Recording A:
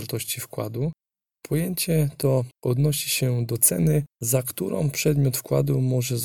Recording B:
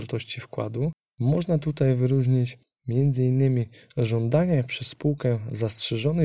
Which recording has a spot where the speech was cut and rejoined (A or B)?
B